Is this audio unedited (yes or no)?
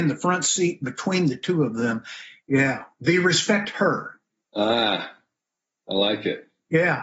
no